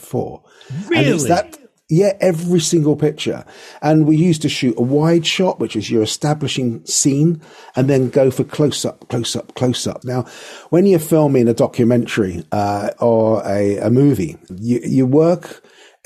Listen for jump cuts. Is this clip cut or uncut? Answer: cut